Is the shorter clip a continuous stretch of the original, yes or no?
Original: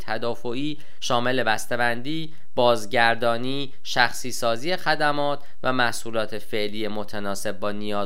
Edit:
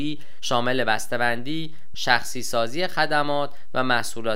no